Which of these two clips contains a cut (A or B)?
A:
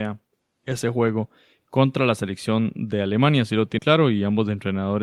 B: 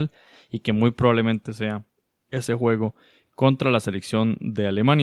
A